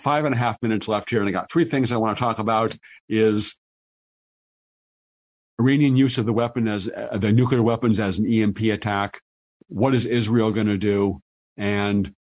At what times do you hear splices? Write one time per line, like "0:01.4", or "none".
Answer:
none